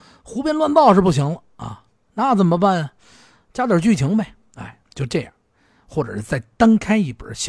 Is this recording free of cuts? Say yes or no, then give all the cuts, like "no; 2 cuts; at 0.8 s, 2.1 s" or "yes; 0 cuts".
yes; 0 cuts